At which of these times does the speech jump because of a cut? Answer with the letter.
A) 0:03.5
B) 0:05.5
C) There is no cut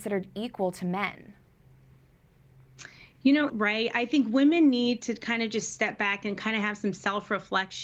A